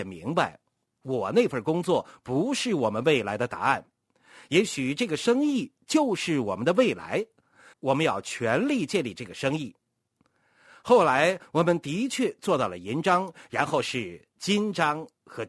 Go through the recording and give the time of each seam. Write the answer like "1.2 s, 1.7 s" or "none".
7.7 s